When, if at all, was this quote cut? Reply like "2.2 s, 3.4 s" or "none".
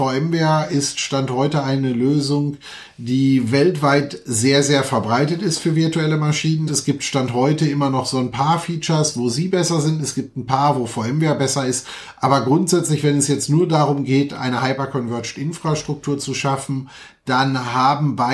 6.7 s